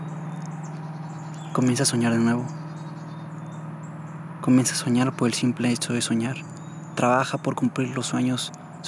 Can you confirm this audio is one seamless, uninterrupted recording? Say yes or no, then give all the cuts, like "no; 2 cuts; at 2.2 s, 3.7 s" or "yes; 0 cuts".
yes; 0 cuts